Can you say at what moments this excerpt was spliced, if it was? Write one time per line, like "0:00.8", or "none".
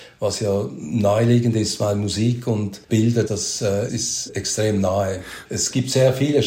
0:02.8
0:05.5